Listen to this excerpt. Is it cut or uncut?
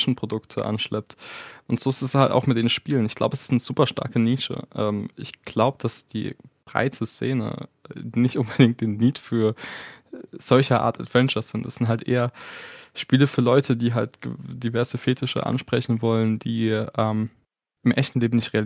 uncut